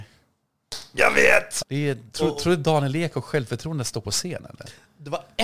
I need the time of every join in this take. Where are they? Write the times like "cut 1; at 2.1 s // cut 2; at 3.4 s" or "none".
cut 1; at 1.6 s